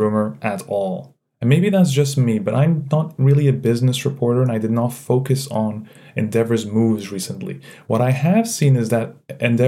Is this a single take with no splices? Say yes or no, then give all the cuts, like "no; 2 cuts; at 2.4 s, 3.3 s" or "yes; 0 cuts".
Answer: yes; 0 cuts